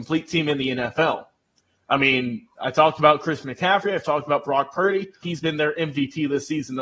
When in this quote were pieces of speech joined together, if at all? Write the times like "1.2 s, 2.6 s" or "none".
5.2 s